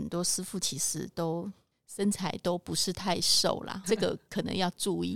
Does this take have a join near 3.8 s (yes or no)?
yes